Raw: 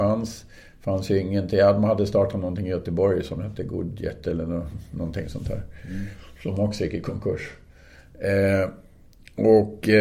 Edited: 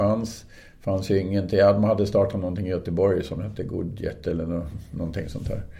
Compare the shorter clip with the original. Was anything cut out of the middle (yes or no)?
no